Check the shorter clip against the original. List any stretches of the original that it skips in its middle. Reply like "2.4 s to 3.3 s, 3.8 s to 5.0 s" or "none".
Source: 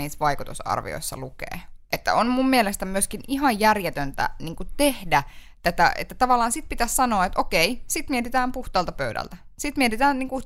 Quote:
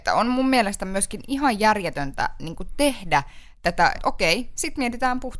5.9 s to 7.3 s